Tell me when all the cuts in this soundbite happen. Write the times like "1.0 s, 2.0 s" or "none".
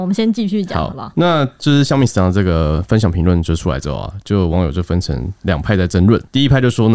none